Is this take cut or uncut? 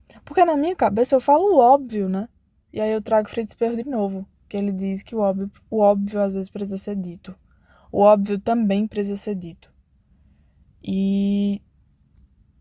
uncut